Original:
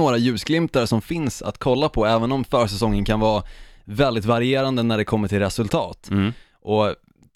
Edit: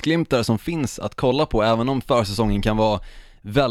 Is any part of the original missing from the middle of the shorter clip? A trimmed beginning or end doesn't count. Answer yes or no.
no